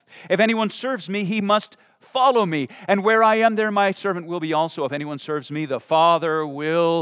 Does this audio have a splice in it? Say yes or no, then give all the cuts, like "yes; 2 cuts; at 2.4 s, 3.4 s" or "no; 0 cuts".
no; 0 cuts